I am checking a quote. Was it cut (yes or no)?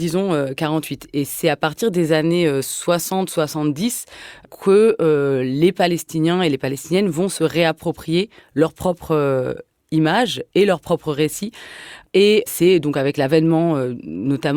no